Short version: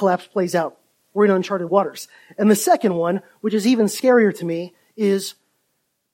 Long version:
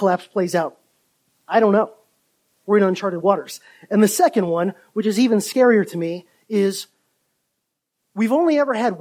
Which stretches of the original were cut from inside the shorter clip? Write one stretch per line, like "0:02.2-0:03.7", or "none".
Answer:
0:00.9-0:02.4